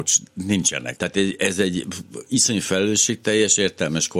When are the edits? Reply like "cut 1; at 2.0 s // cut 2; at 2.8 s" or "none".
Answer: cut 1; at 1.0 s